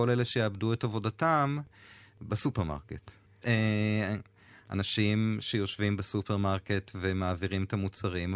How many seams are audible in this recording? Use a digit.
1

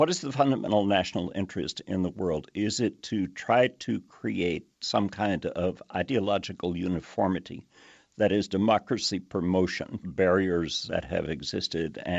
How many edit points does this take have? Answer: 1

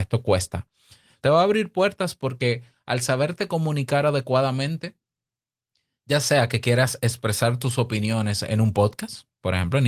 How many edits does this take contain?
1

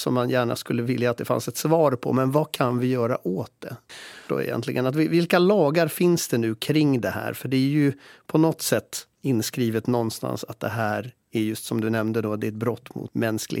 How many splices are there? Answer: 1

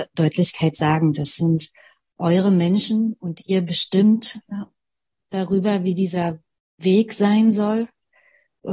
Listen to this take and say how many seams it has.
0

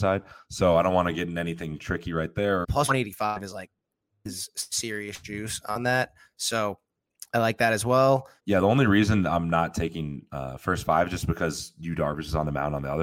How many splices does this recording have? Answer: 1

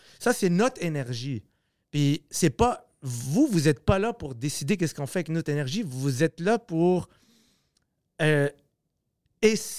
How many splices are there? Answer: 0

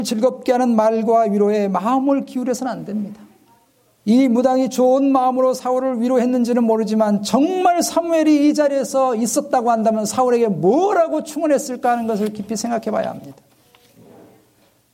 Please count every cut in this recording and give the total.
0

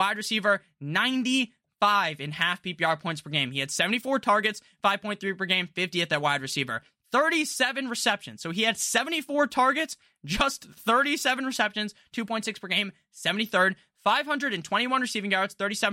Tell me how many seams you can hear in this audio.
0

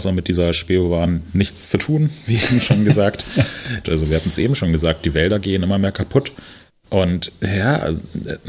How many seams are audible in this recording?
2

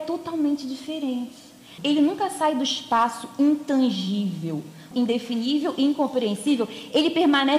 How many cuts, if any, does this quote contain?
2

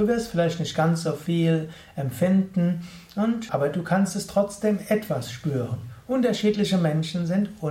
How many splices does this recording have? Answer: 2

